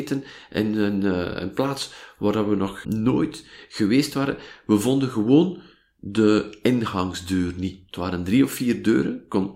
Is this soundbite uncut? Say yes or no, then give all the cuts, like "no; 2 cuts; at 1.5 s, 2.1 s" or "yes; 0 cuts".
no; 1 cut; at 2.8 s